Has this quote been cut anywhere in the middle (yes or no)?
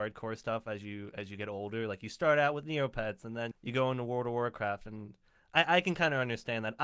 yes